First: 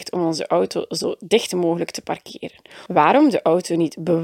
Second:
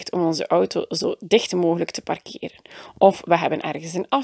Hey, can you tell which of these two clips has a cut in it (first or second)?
first